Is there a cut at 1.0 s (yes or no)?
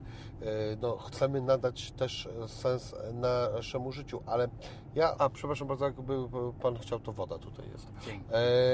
no